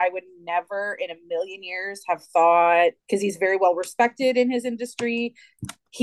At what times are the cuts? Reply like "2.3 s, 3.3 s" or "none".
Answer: 3.0 s